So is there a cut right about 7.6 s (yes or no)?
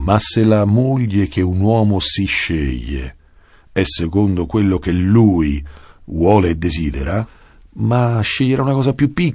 no